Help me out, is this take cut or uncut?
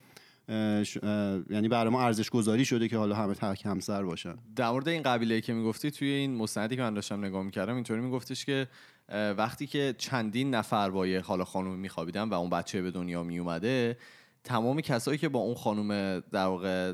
uncut